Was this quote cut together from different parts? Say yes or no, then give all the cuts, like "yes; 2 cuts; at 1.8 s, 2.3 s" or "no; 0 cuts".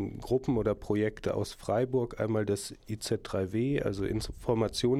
no; 0 cuts